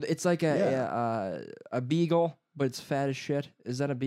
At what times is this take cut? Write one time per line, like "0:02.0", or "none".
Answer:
none